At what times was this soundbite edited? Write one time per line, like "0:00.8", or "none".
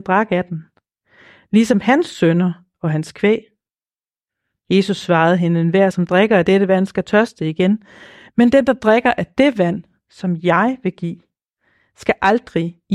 none